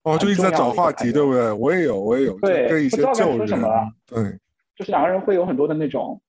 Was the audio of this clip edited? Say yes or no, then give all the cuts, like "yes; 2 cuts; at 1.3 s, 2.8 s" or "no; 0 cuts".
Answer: no; 0 cuts